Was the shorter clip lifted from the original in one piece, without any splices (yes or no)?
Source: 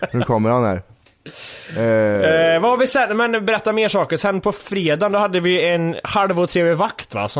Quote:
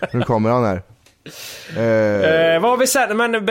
yes